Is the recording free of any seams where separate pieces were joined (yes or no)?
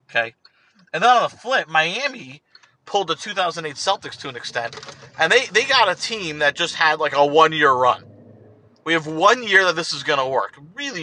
yes